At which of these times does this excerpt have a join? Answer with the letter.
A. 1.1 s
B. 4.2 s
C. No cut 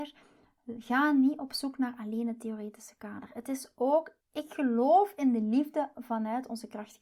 B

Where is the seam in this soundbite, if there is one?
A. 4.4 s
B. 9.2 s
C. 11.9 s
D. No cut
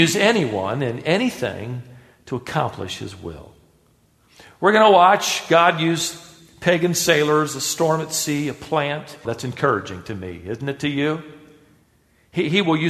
B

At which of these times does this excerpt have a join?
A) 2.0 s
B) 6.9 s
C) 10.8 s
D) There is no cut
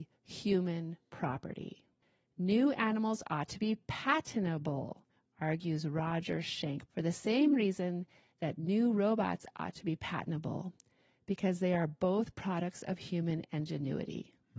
B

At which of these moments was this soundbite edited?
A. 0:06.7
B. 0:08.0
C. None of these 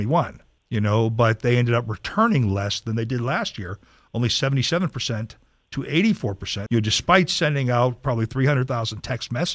A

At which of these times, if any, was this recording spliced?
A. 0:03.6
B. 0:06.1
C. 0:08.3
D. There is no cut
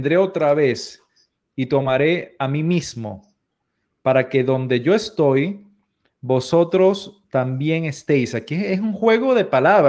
D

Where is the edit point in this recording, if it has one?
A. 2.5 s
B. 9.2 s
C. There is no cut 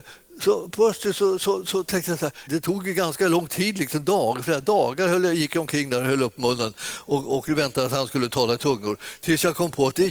A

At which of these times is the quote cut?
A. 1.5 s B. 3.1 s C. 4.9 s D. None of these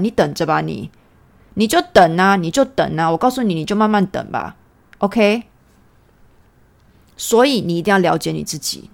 D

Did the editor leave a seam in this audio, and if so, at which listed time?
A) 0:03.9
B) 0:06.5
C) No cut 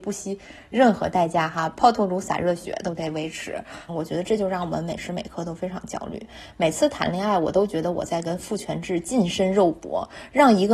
A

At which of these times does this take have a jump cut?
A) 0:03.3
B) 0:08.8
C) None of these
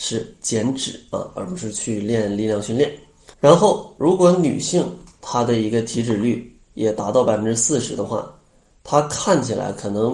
A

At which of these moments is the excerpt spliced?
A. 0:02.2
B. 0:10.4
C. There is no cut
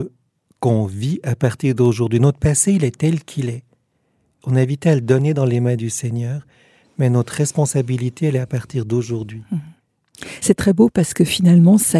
C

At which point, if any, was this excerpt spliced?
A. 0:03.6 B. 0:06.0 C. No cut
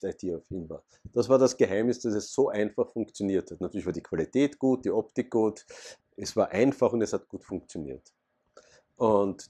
B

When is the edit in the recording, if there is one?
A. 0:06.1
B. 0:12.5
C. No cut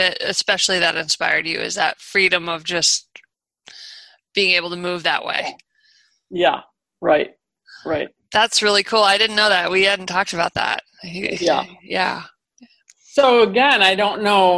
C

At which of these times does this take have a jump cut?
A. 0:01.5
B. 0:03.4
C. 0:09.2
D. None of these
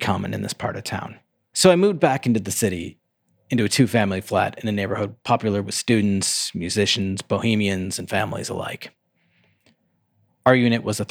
A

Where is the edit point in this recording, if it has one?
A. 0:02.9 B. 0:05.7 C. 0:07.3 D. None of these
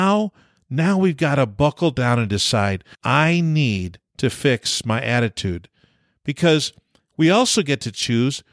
A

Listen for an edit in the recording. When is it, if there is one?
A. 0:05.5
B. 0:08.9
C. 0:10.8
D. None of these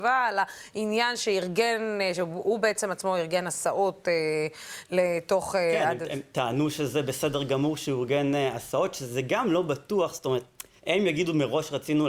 C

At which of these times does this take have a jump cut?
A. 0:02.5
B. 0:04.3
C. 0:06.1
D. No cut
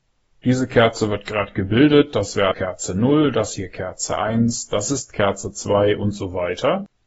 A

